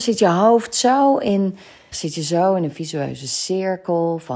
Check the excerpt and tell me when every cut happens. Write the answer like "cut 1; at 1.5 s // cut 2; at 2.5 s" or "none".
cut 1; at 1.9 s